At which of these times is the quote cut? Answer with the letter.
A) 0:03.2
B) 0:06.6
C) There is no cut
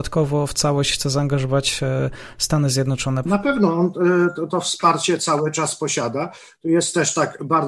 A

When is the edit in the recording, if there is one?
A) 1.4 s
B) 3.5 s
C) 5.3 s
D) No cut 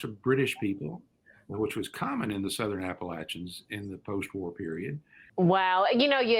C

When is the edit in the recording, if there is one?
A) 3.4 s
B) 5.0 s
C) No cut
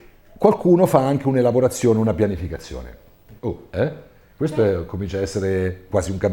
A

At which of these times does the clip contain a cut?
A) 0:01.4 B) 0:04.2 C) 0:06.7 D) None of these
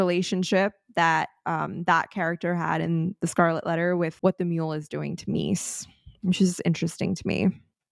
B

